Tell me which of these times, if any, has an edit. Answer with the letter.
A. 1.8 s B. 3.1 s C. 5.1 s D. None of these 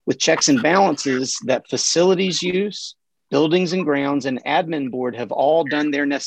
D